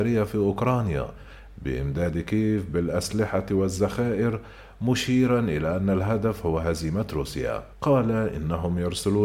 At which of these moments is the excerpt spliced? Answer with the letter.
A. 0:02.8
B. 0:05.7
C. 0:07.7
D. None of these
C